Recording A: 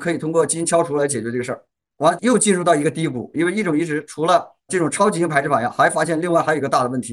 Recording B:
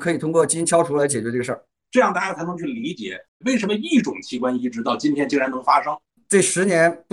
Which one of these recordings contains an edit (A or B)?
B